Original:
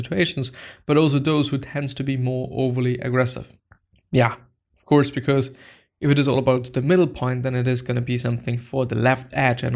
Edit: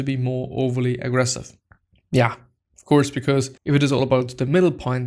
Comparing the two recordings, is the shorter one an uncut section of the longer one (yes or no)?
no